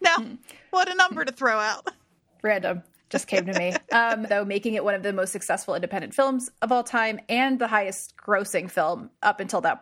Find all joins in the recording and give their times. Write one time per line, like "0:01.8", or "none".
0:04.3